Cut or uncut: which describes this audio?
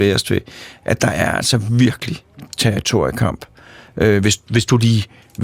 uncut